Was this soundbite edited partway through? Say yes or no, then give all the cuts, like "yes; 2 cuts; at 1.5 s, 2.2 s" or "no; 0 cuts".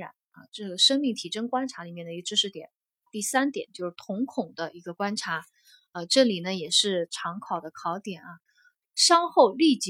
yes; 2 cuts; at 3.1 s, 8.8 s